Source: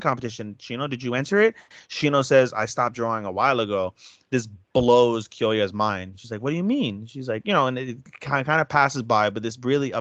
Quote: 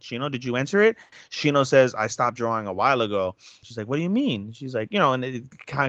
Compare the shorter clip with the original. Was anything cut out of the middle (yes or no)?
yes